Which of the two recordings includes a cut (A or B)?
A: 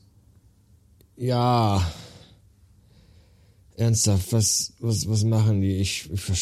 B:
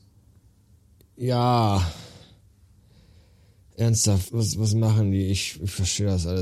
B